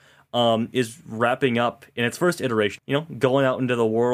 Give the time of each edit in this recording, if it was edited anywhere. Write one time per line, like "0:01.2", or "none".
0:02.8